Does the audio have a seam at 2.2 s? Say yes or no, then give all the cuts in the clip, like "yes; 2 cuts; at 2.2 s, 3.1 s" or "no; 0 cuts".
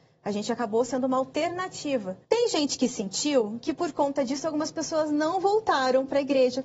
yes; 1 cut; at 2.2 s